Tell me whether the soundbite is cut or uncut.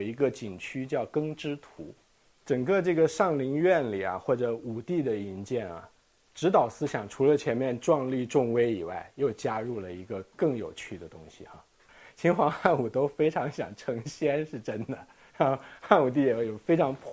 uncut